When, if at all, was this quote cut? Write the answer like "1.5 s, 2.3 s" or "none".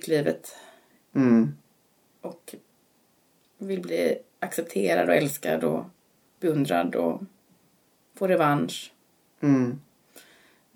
none